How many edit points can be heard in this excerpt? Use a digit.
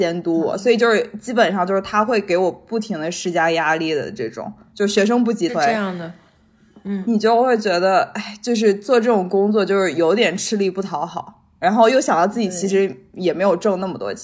1